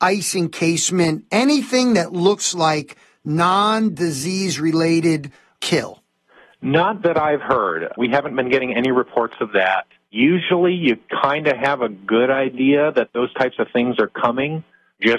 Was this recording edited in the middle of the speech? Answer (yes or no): no